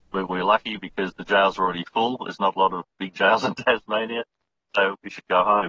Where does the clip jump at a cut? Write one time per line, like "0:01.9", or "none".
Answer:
none